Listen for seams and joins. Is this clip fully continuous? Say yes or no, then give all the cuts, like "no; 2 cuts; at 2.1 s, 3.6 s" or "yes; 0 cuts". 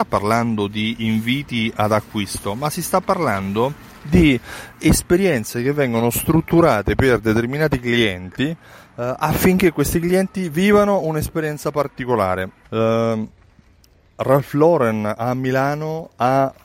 no; 1 cut; at 12.6 s